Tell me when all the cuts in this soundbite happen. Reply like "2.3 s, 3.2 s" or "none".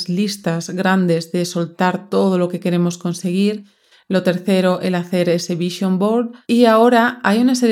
none